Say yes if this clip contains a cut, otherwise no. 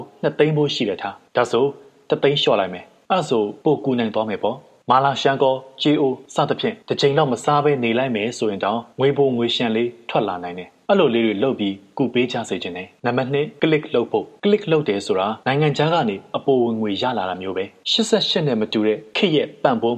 no